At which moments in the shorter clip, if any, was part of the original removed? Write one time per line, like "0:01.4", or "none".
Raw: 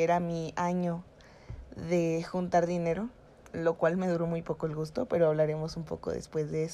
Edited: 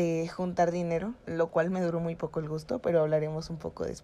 0:01.2